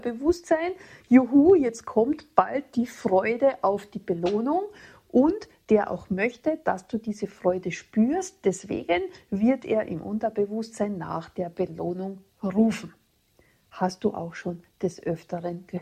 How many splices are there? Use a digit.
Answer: 0